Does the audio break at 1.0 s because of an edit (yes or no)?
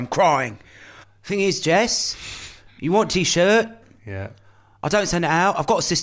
yes